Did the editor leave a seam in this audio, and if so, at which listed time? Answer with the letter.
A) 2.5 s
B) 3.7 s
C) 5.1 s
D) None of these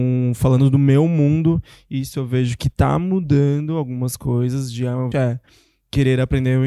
C